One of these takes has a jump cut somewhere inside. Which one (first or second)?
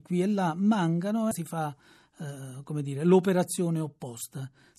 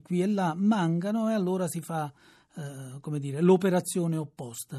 first